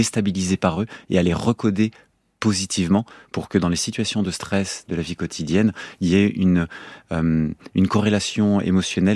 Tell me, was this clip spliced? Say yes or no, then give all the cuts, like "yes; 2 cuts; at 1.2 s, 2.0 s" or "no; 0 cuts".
no; 0 cuts